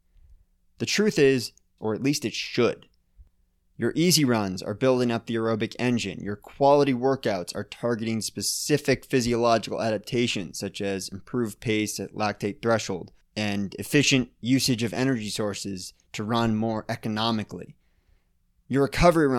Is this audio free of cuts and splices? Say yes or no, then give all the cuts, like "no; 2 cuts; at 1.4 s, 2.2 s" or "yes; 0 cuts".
no; 1 cut; at 1.8 s